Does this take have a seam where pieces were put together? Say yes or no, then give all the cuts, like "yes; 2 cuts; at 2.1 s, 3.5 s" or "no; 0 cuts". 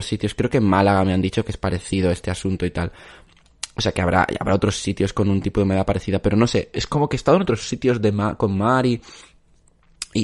no; 0 cuts